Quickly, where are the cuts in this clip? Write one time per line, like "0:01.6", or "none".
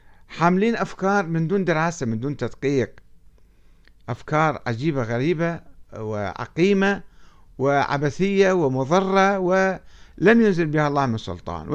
none